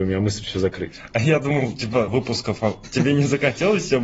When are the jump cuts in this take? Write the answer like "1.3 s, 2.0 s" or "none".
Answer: 2.1 s